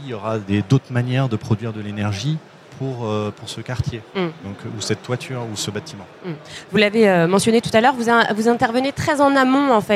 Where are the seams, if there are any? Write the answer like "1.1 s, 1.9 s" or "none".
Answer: none